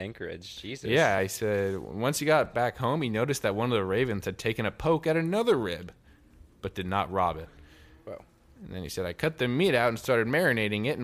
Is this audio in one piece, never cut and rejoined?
yes; 0 cuts

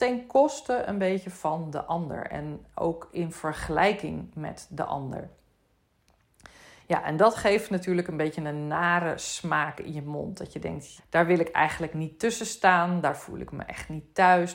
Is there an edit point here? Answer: yes; 1 cut; at 11.0 s

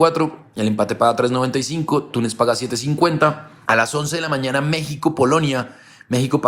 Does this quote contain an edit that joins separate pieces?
no; 0 cuts

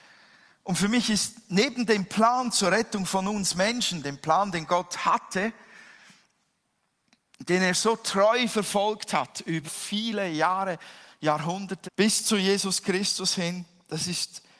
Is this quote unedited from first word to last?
no; 2 cuts; at 9.6 s, 11.8 s

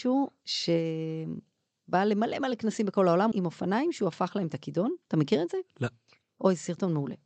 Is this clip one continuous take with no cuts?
no; 1 cut; at 3.3 s

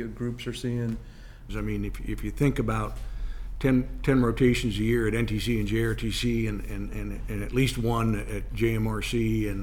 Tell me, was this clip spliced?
yes; 2 cuts; at 1.5 s, 3.6 s

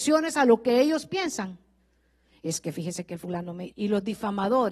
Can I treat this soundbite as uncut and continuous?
no; 1 cut; at 3.7 s

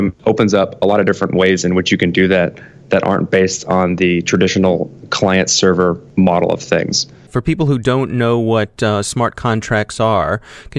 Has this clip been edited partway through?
no; 0 cuts

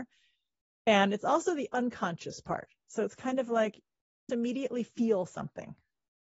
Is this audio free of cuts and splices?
no; 1 cut; at 4.3 s

